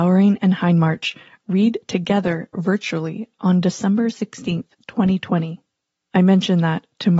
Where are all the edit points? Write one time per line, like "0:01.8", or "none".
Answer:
none